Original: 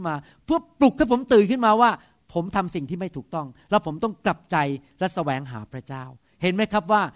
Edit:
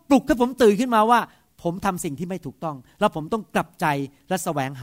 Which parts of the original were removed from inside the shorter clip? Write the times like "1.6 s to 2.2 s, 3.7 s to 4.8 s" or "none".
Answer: none